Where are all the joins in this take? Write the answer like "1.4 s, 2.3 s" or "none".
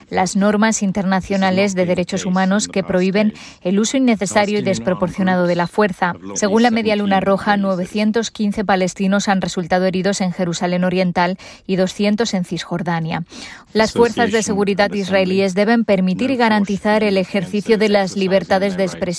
6.3 s, 13.7 s